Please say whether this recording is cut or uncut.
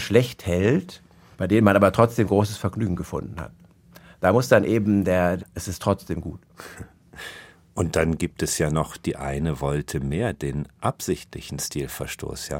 cut